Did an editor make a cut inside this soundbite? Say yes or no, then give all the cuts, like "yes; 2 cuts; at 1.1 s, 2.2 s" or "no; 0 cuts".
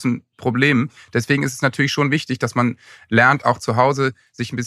no; 0 cuts